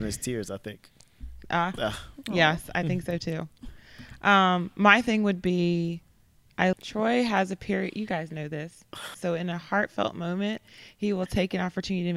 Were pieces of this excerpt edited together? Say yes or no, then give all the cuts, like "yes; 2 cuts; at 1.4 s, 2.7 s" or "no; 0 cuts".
yes; 2 cuts; at 6.7 s, 9.1 s